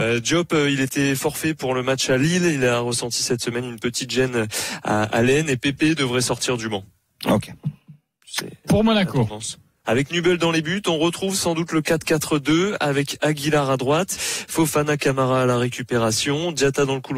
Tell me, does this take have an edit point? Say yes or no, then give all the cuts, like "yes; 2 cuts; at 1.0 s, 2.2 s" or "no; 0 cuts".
yes; 2 cuts; at 9.8 s, 14.2 s